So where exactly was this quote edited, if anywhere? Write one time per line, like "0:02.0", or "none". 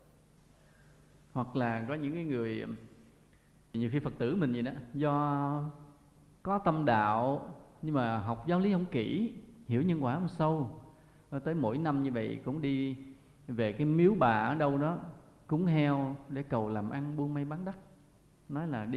none